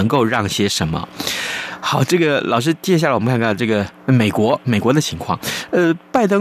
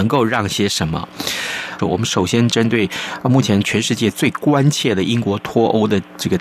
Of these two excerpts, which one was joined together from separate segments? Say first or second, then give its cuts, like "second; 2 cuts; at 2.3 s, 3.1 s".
second; 1 cut; at 1.8 s